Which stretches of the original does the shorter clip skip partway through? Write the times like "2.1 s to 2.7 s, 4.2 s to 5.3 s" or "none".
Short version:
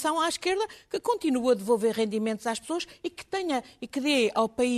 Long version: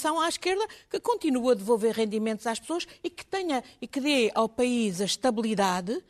none